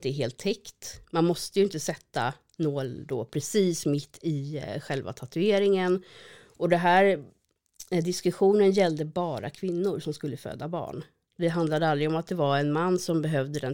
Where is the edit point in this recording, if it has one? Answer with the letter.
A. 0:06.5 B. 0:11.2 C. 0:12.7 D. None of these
D